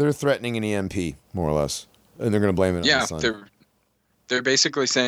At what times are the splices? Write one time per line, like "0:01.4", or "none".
0:01.2